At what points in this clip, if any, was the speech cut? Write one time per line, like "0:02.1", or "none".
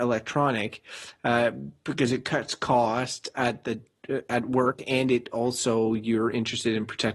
none